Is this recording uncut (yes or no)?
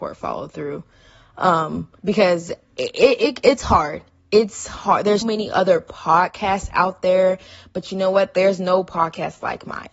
no